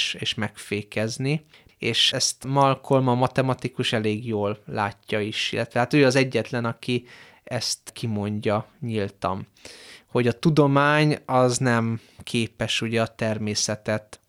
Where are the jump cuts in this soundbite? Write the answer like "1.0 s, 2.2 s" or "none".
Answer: 1.7 s